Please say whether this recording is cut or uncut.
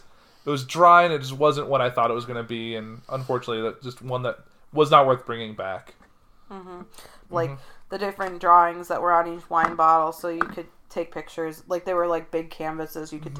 cut